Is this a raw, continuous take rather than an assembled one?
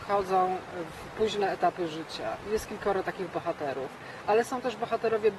yes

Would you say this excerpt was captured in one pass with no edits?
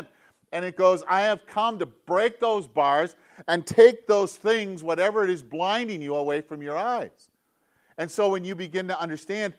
yes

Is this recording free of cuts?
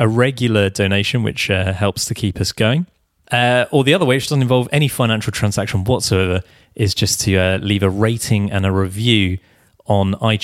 yes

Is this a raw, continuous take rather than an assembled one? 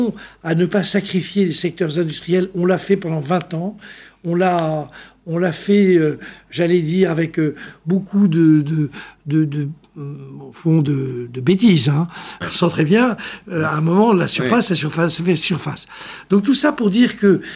no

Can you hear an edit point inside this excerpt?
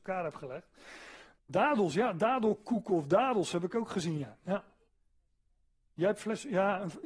yes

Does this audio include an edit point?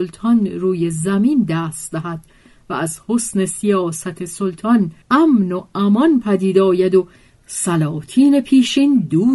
yes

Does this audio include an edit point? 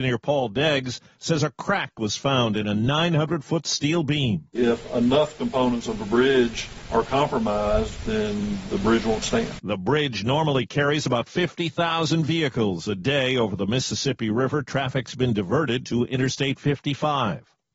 no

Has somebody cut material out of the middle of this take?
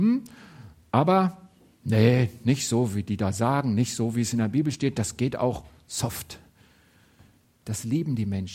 yes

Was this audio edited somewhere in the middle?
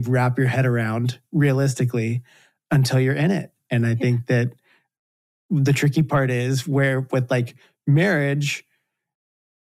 no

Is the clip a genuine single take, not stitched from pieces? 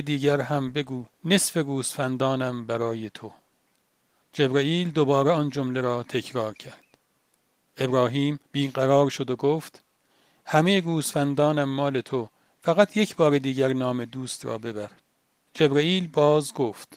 no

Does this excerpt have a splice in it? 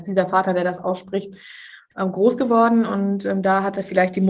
no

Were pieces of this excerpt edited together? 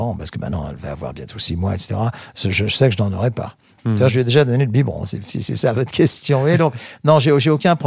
no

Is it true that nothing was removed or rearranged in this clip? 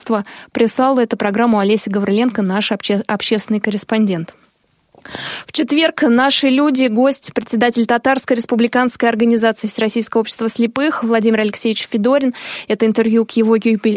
yes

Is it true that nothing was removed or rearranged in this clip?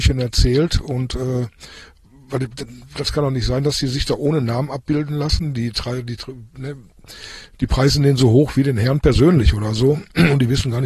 yes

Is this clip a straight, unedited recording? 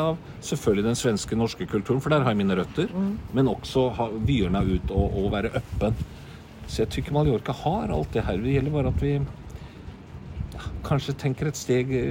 yes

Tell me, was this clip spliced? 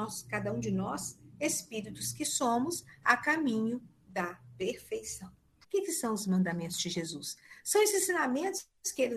yes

